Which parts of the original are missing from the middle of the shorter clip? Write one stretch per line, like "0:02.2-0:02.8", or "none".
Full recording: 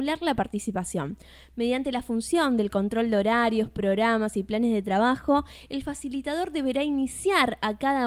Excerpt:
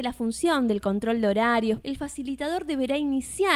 0:03.7-0:05.7